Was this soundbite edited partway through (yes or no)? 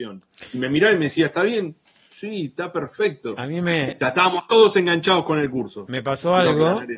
no